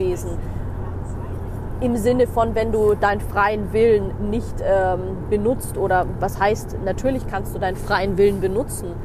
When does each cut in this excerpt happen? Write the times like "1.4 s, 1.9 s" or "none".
none